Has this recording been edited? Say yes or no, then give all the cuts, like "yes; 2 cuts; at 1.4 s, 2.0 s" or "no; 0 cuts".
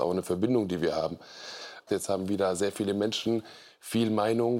yes; 1 cut; at 1.9 s